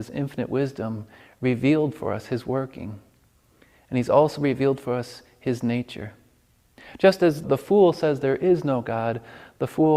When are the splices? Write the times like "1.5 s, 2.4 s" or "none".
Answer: 7.4 s